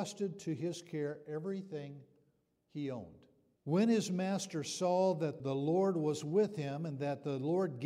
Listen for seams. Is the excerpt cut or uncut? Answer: cut